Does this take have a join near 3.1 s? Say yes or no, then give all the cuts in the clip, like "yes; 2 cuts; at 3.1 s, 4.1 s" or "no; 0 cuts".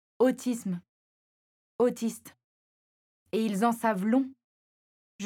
no; 0 cuts